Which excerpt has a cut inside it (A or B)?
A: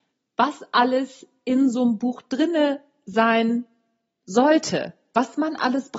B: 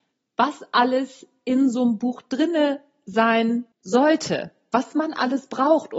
B